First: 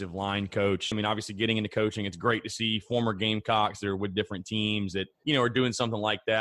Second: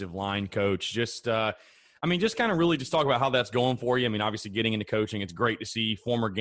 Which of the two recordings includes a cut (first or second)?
first